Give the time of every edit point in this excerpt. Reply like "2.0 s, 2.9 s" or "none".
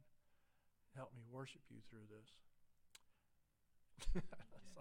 3.9 s